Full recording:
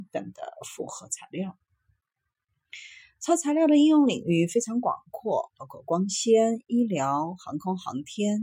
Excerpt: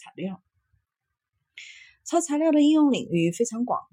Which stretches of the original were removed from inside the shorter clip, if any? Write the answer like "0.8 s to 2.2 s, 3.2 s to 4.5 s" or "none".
none